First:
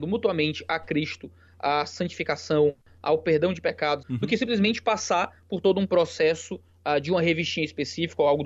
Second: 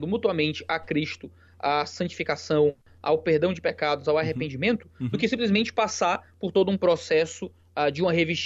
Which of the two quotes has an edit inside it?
first; 1 cut; at 4.0 s

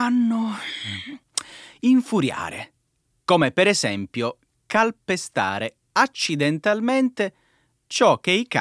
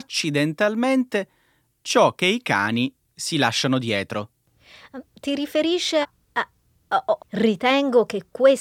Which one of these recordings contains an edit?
second; 2 cuts; at 6.0 s, 7.2 s

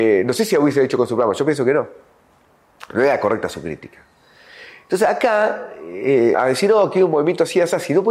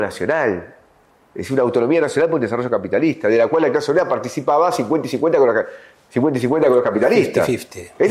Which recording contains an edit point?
first; 1 cut; at 6.3 s

